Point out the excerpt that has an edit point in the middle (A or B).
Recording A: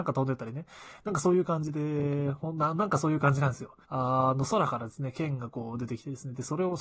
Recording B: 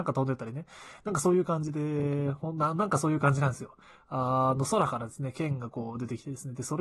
A